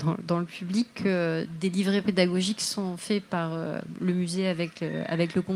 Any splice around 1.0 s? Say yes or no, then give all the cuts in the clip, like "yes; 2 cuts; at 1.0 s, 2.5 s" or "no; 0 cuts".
no; 0 cuts